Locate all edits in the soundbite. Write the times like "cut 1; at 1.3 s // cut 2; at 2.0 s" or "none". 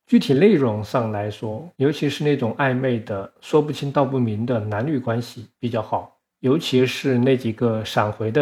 cut 1; at 1.8 s

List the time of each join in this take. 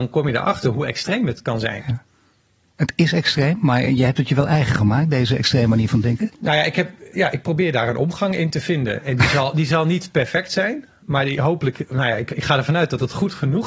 cut 1; at 7.1 s

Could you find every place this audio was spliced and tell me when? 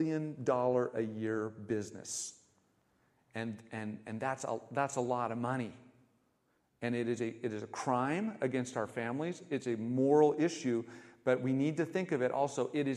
none

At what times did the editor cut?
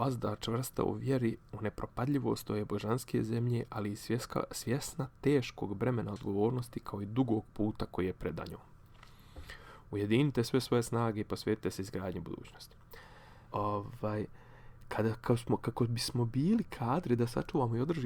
cut 1; at 13.5 s

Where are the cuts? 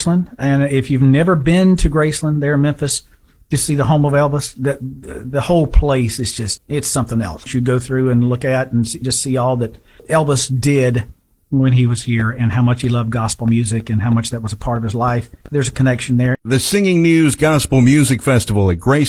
cut 1; at 6.6 s

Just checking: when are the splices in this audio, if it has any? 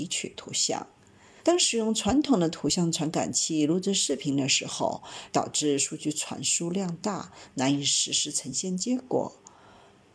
cut 1; at 1.4 s // cut 2; at 5.3 s

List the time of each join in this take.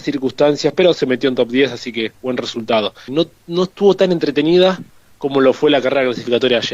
cut 1; at 3.1 s

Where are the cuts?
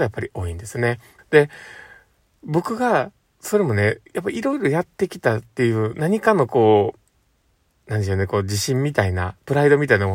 cut 1; at 1.2 s

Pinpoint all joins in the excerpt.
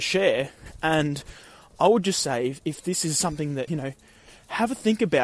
cut 1; at 3.7 s

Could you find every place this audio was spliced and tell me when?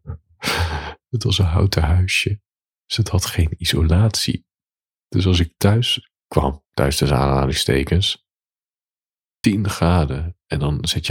cut 1; at 6.7 s // cut 2; at 9.4 s

